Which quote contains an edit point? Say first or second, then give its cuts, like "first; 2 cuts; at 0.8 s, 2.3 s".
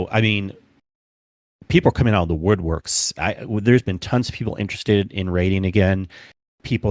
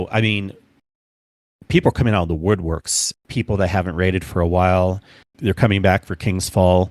second; 2 cuts; at 3.1 s, 5.3 s